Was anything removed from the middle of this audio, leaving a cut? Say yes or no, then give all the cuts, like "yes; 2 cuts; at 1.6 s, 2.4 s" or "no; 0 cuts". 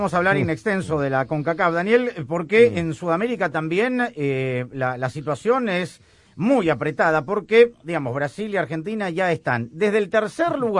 no; 0 cuts